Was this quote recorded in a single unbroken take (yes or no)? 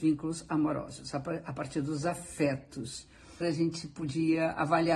no